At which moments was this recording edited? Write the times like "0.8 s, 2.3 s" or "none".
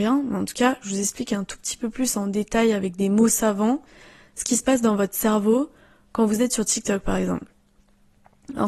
none